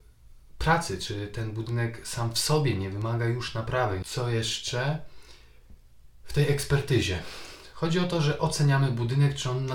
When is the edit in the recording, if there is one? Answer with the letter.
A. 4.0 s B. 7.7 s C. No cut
A